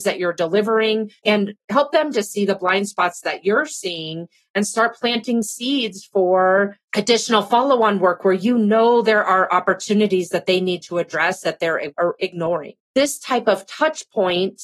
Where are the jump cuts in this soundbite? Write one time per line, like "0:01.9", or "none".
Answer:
0:01.2
0:12.8